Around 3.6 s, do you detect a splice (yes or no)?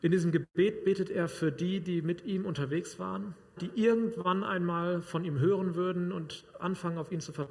yes